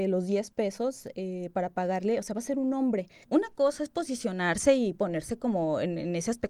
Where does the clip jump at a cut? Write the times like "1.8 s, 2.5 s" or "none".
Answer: 3.2 s